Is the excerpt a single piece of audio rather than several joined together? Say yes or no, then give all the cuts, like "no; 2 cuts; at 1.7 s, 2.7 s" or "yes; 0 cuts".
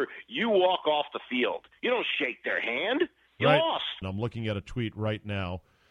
no; 1 cut; at 4.0 s